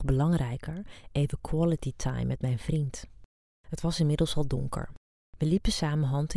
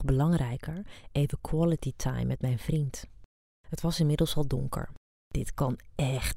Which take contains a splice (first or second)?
second